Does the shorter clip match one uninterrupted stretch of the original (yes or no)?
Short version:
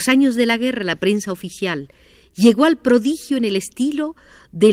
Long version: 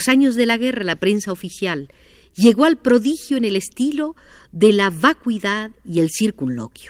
yes